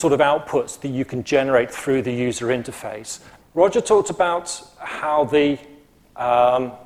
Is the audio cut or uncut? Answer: cut